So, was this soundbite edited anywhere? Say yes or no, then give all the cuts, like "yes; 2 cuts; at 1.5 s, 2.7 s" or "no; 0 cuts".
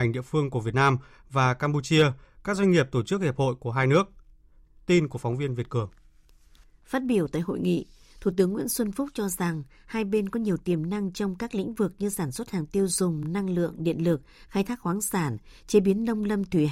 no; 0 cuts